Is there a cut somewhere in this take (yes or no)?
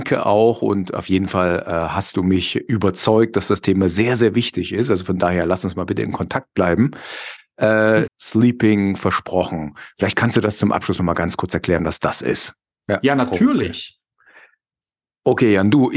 yes